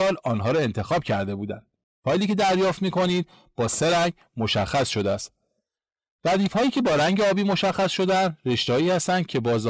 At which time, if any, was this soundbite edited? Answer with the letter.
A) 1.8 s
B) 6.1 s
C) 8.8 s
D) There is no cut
A